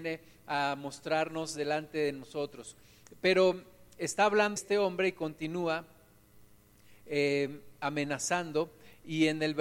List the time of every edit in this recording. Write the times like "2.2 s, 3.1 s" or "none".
4.6 s